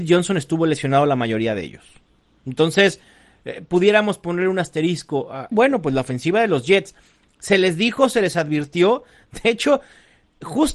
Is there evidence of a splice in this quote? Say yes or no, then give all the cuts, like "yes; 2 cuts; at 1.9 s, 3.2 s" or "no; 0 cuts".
yes; 1 cut; at 5.5 s